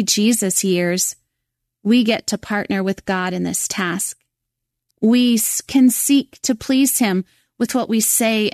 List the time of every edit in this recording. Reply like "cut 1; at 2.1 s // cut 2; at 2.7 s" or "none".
cut 1; at 4.9 s